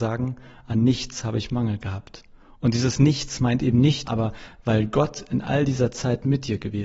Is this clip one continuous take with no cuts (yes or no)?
no